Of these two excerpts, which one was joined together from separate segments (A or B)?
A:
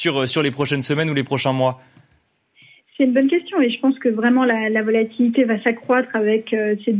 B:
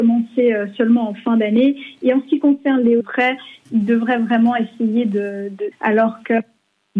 B